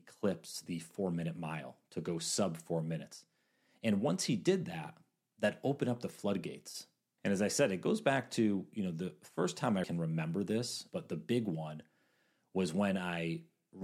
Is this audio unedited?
no; 3 cuts; at 7.2 s, 9.8 s, 10.9 s

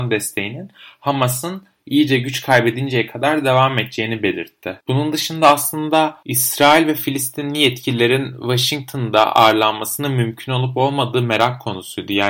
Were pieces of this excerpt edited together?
no; 0 cuts

